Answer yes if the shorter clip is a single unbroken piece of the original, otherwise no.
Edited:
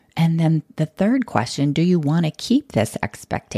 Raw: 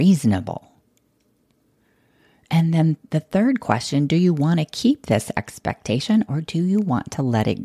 yes